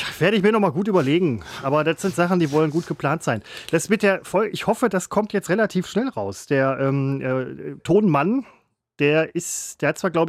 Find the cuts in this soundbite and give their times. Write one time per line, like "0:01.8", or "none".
none